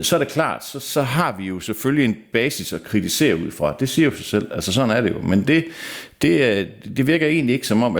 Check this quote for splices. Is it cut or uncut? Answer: uncut